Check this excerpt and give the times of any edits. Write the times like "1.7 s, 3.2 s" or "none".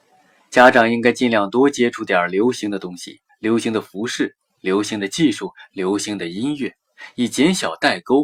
3.3 s

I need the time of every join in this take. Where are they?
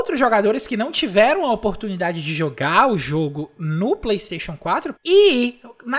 5.0 s

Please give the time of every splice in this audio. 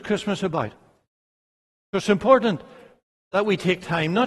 1.7 s

